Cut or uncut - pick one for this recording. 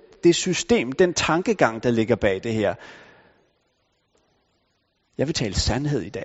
uncut